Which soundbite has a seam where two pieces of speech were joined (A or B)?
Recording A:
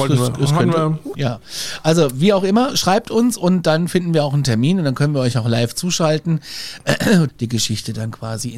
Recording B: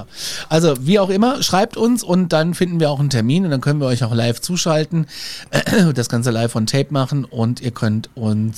A